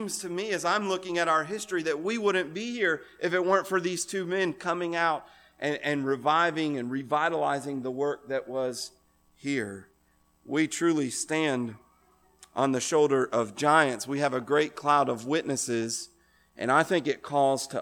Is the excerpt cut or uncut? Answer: uncut